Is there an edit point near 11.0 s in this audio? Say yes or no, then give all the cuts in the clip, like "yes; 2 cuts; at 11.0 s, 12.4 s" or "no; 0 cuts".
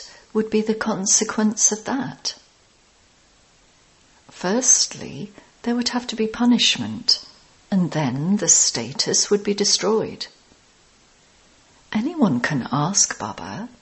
no; 0 cuts